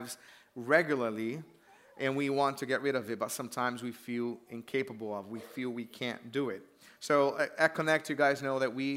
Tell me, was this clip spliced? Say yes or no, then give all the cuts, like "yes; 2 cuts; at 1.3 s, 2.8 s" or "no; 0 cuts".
no; 0 cuts